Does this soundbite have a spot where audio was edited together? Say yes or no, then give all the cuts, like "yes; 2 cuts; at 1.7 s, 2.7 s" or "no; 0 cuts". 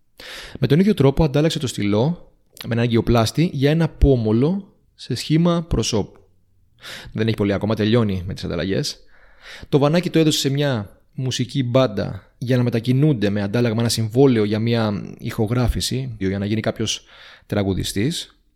yes; 3 cuts; at 7.1 s, 12.4 s, 16.2 s